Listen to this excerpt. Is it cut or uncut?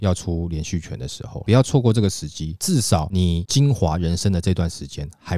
cut